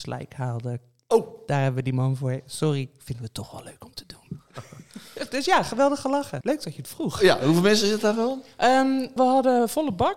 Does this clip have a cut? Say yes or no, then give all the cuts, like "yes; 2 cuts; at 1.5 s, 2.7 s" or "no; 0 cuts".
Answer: yes; 2 cuts; at 6.4 s, 9.2 s